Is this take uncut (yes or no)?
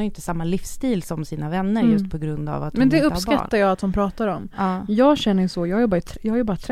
yes